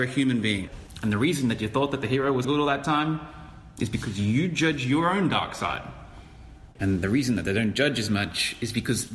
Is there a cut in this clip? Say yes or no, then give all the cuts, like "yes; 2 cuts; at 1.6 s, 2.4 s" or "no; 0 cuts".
yes; 2 cuts; at 2.4 s, 6.8 s